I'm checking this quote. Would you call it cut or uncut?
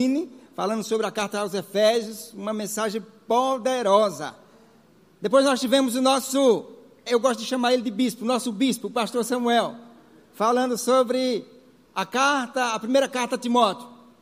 cut